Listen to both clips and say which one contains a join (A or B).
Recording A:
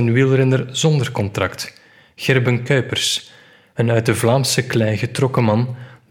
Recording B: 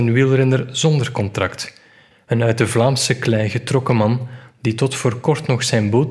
B